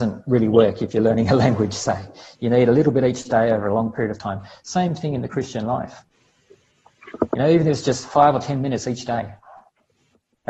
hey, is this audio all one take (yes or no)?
yes